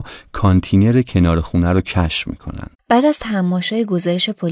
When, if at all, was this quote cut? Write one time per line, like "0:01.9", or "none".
0:02.7